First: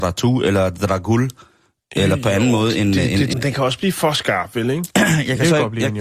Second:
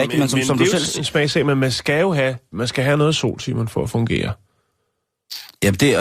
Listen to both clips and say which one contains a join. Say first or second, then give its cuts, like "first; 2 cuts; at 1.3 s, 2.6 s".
first; 2 cuts; at 3.3 s, 4.9 s